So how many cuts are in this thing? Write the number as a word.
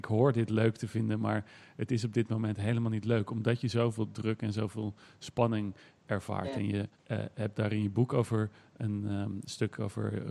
one